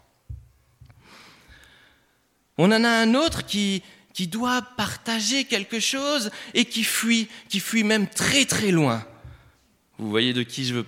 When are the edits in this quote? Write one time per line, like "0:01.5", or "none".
0:02.6